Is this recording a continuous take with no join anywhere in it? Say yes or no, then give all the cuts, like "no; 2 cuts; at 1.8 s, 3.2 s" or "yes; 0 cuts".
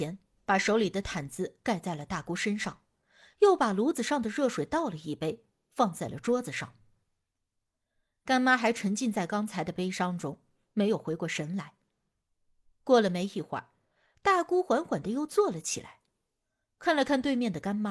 yes; 0 cuts